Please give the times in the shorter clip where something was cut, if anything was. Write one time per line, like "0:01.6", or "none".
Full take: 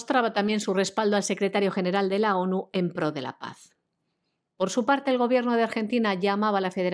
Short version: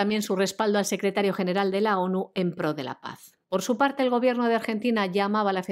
0:03.4

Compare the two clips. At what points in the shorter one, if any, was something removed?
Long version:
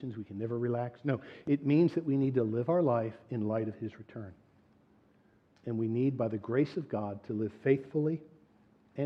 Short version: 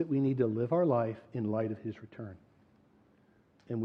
none

